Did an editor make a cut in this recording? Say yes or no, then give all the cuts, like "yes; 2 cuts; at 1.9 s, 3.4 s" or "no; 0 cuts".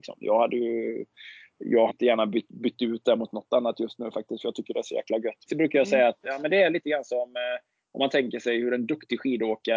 yes; 2 cuts; at 1.9 s, 5.5 s